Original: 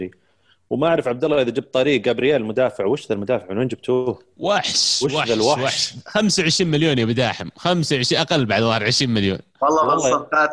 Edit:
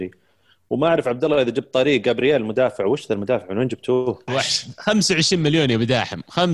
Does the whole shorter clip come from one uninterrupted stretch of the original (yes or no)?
no